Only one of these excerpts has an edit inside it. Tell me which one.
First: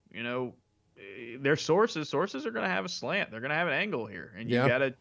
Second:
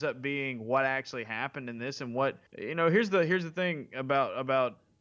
second; 1 cut; at 2.5 s

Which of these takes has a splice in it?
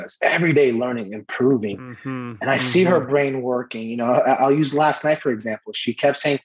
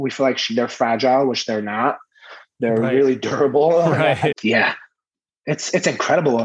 second; 1 cut; at 4.3 s

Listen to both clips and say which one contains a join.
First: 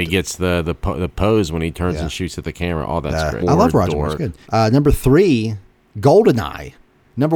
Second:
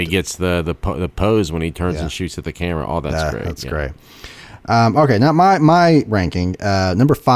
first; 2 cuts; at 3.4 s, 4.4 s

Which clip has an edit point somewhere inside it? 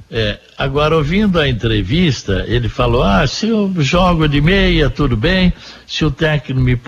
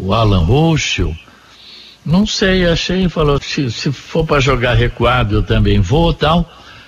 second; 1 cut; at 3.4 s

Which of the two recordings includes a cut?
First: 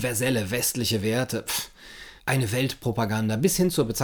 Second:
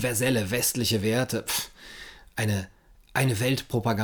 first; 1 cut; at 2.2 s

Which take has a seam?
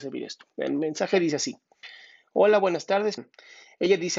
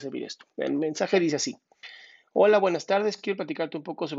first; 1 cut; at 3.2 s

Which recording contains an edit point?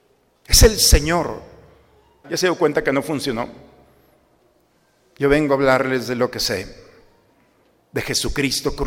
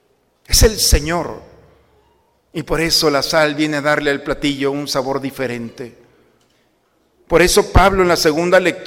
first; 1 cut; at 2.2 s

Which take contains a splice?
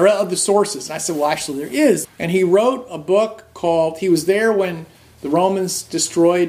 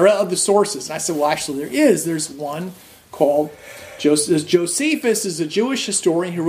first; 1 cut; at 2.0 s

